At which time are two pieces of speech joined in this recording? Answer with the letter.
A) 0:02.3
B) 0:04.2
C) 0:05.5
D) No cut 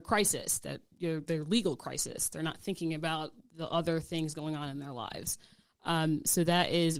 D